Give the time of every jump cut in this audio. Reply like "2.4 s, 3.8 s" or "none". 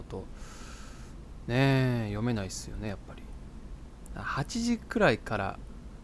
4.1 s

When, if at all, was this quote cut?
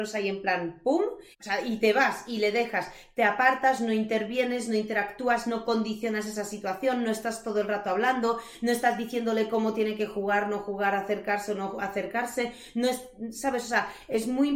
1.3 s

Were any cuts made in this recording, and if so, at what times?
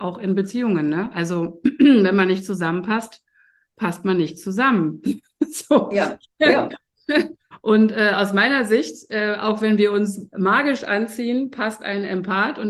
none

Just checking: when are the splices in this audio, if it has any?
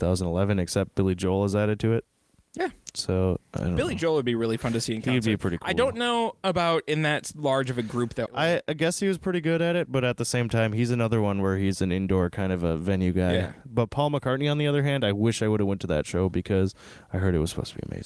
8.3 s

